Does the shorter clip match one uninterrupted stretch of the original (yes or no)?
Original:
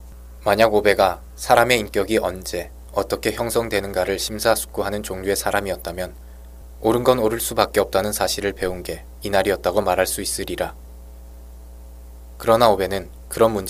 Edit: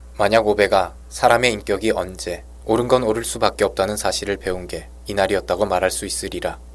no